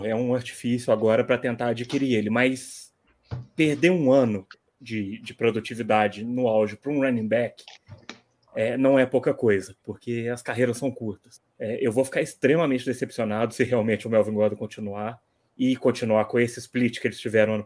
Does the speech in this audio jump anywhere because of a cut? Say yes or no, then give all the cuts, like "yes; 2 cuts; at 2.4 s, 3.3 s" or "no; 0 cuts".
no; 0 cuts